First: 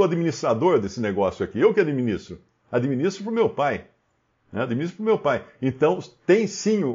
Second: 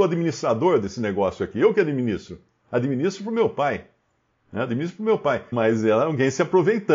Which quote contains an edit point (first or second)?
second